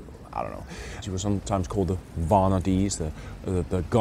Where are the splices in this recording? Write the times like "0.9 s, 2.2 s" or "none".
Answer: 1.0 s